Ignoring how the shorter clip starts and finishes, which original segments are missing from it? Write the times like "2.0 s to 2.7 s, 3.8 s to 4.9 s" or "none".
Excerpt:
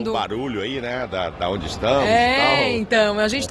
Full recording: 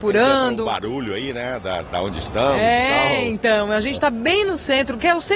none

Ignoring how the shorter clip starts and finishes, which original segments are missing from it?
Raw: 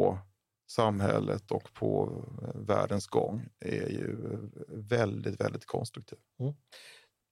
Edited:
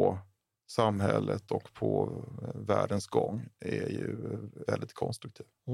4.7 s to 5.4 s

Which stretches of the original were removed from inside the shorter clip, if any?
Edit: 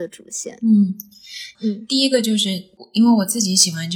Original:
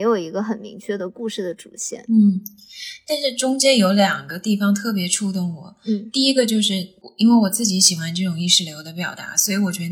3.0 s to 5.8 s

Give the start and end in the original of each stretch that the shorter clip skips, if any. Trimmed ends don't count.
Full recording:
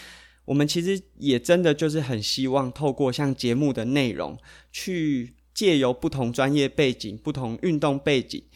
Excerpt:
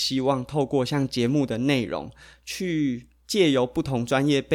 none

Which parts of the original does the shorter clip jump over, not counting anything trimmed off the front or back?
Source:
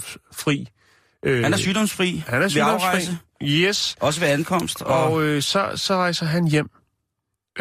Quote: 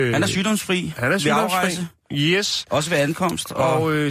none

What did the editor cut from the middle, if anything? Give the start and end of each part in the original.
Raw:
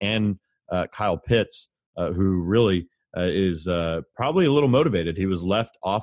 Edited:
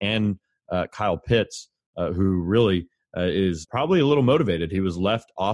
3.6 s to 4.1 s

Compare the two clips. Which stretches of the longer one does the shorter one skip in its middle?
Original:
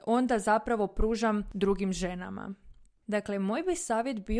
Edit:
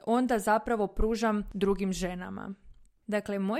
none

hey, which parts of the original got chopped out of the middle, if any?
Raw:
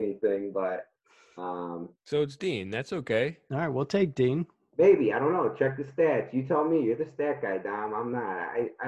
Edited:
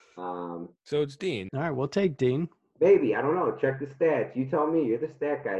2.7 s to 3.5 s

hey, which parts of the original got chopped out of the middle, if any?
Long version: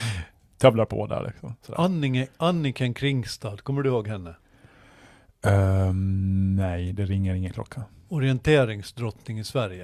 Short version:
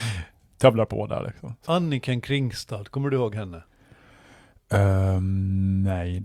1.7 s to 2.4 s

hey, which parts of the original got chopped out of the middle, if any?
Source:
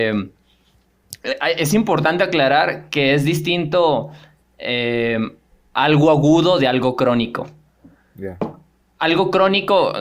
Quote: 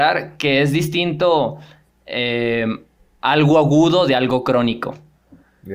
none

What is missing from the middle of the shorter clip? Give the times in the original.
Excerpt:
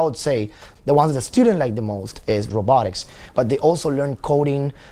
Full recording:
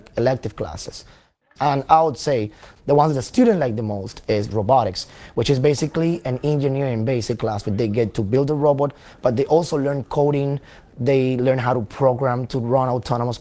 5.3 s to 9.2 s

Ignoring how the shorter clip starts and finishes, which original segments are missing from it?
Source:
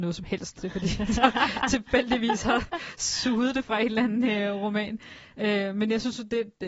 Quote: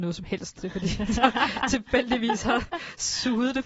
none

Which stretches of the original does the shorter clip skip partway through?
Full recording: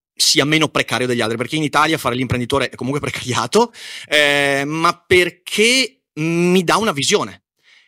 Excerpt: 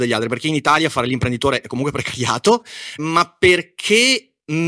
4.1 s to 4.7 s

